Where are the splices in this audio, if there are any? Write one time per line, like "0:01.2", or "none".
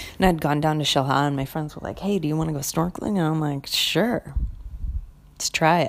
none